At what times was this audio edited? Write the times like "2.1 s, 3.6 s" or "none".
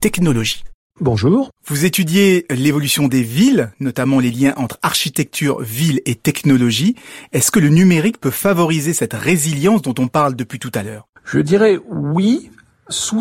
0.9 s